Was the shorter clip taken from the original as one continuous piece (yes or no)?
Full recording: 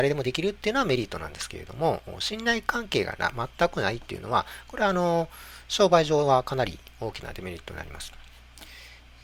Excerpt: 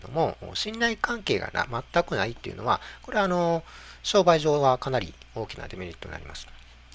yes